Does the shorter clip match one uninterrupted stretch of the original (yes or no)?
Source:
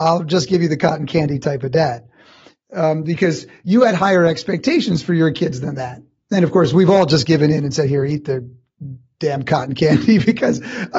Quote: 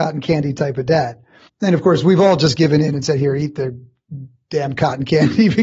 no